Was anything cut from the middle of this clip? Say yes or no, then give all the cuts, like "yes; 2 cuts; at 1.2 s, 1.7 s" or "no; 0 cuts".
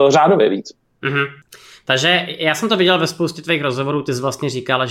no; 0 cuts